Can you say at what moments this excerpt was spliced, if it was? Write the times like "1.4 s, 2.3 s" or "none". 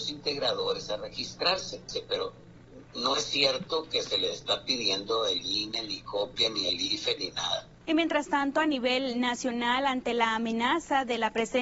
7.8 s